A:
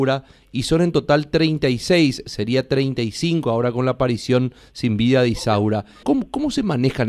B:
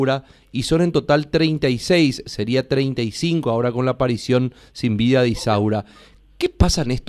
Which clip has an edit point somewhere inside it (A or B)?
A